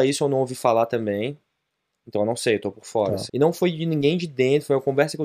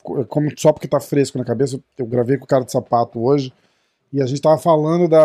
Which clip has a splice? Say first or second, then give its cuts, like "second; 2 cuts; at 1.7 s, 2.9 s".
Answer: first; 1 cut; at 3.3 s